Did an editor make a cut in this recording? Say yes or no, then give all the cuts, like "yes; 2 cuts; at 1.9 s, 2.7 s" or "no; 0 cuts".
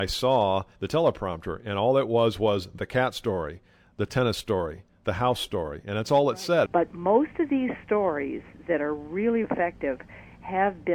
yes; 2 cuts; at 6.7 s, 9.4 s